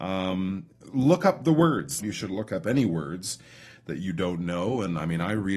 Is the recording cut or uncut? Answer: cut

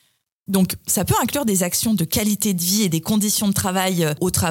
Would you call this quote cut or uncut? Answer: uncut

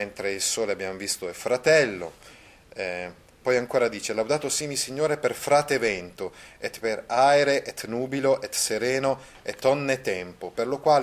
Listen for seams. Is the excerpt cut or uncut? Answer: uncut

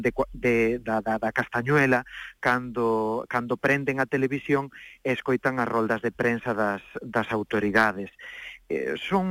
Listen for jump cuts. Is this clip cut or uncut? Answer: uncut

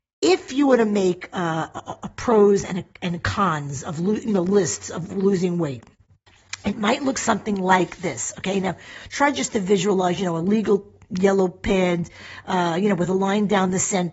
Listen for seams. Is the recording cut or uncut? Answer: uncut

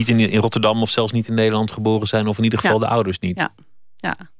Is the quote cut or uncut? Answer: uncut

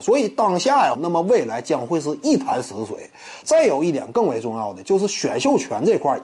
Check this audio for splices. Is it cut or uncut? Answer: cut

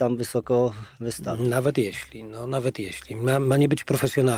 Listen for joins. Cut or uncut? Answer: uncut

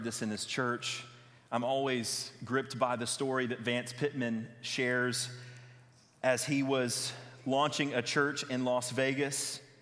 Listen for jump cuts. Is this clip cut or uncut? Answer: uncut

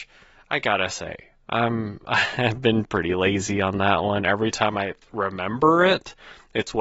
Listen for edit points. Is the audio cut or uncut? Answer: uncut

